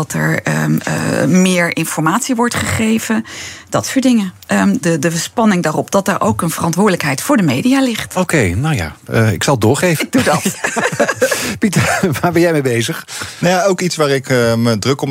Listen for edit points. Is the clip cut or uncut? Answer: cut